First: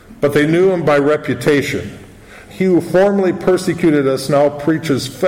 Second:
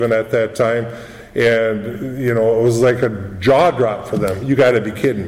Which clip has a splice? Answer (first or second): first